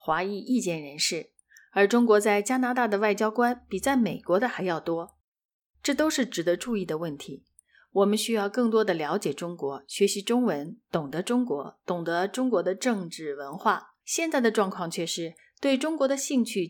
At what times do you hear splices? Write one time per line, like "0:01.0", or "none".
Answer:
0:14.0

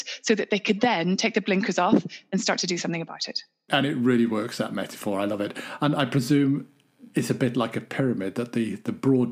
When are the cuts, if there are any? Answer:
none

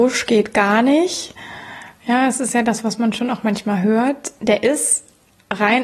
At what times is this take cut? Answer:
none

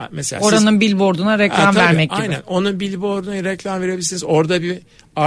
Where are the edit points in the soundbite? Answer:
none

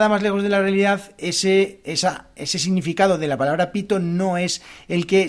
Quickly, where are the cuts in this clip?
none

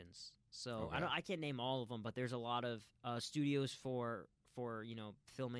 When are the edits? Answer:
0:02.9

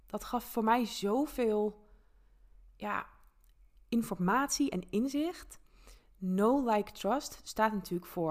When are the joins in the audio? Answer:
none

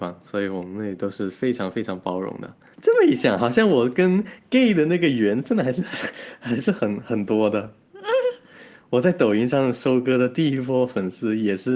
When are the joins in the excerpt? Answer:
none

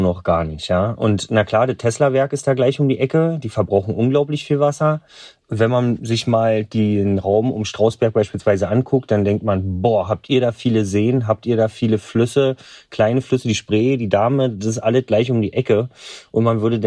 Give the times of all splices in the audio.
none

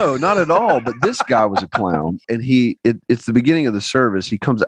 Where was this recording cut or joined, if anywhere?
0:02.2

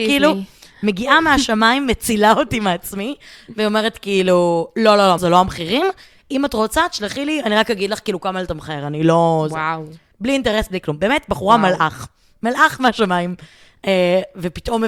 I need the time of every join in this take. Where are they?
0:05.2

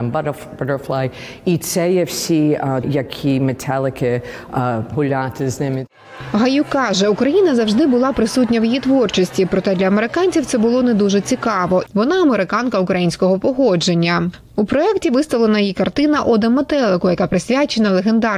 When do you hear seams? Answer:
0:02.8
0:04.9
0:11.9

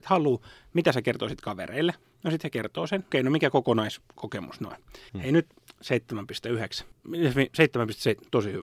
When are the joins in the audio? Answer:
0:03.1
0:05.1

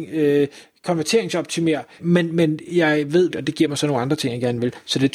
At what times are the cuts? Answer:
0:02.0
0:03.3

